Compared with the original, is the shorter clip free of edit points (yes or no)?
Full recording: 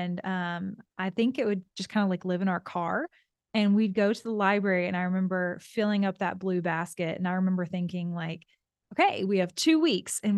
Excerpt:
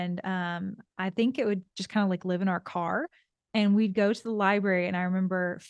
yes